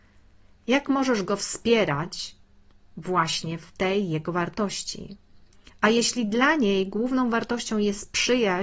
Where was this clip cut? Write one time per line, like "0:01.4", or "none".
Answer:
none